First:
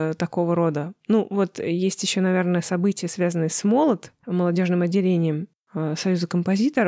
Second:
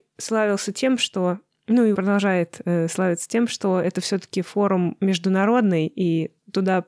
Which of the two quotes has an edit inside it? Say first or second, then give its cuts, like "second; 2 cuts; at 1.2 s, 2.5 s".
second; 1 cut; at 1.9 s